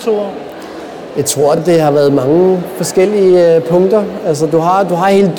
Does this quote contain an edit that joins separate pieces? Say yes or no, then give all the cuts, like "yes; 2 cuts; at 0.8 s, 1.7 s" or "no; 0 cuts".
no; 0 cuts